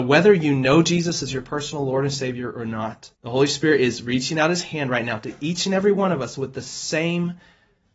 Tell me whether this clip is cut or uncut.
cut